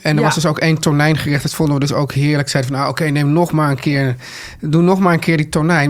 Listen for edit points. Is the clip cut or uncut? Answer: uncut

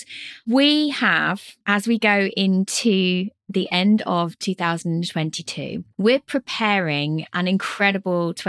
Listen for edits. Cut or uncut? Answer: uncut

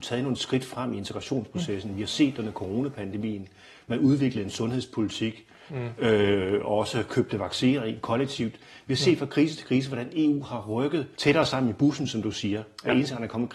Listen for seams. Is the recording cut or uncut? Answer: cut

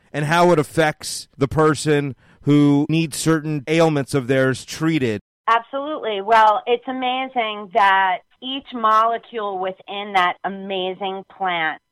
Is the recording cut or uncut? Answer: uncut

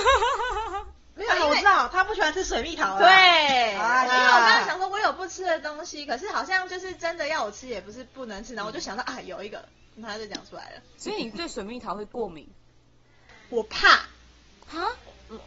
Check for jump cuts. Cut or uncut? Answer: cut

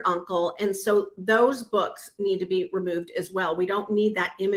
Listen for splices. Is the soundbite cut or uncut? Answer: uncut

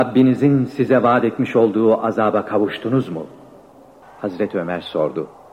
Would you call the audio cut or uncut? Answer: cut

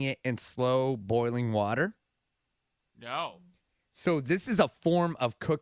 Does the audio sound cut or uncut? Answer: uncut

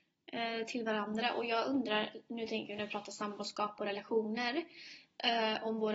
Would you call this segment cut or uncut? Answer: uncut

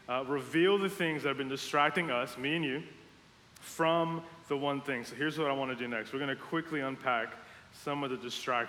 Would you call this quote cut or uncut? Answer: cut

